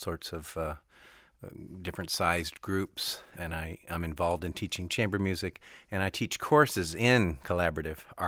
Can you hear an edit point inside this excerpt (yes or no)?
no